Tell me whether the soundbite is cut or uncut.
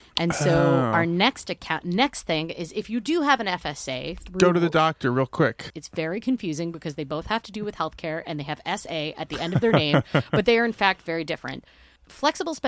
cut